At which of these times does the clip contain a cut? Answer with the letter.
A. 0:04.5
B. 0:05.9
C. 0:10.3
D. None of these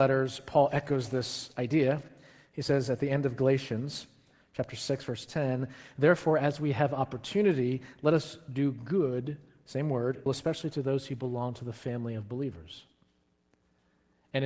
C